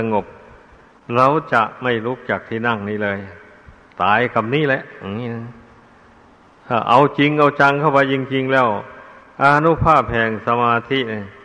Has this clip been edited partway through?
no; 0 cuts

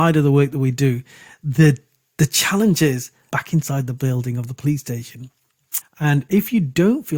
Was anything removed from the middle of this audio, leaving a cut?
yes; 2 cuts; at 3.3 s, 5.8 s

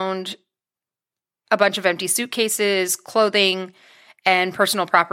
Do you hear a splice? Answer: no; 0 cuts

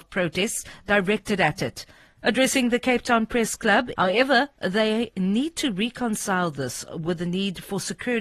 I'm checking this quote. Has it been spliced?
yes; 2 cuts; at 2.2 s, 3.9 s

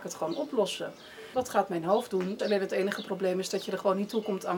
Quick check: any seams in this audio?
yes; 2 cuts; at 1.3 s, 2.4 s

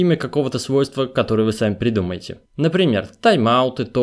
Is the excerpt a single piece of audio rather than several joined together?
no; 1 cut; at 2.5 s

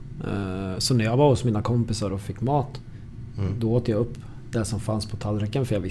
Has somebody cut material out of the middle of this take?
no; 0 cuts

